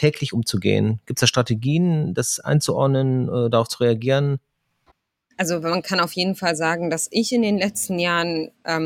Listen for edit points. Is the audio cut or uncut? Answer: uncut